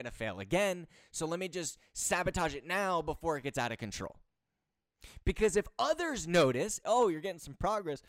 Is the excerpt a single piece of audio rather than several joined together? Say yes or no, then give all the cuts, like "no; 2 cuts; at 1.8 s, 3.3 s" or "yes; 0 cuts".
no; 1 cut; at 6.8 s